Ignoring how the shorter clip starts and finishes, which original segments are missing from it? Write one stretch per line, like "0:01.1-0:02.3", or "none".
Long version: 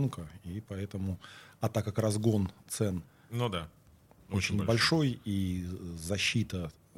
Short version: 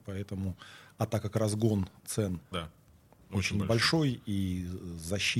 0:03.1-0:03.5